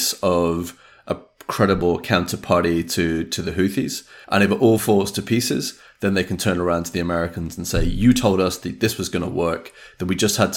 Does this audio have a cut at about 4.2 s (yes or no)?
yes